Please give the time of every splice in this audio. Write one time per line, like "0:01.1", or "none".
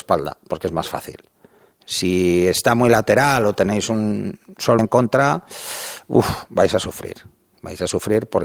0:04.8

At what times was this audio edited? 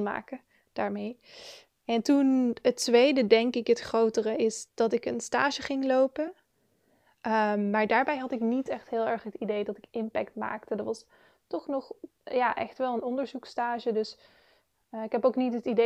none

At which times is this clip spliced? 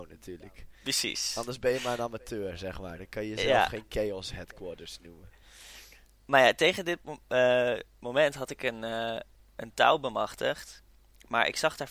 none

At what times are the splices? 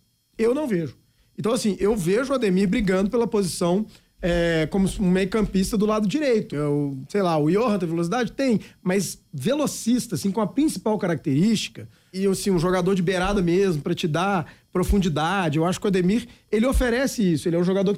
0:06.5
0:12.1

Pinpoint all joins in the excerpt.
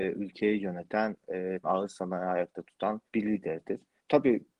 0:01.6
0:03.1

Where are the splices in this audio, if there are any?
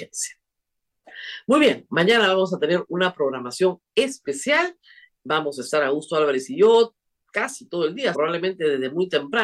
0:08.1

